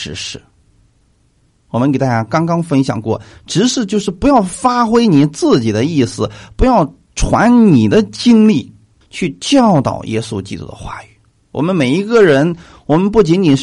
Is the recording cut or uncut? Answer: cut